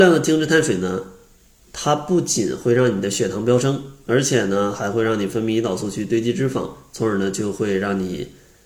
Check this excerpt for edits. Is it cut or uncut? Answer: uncut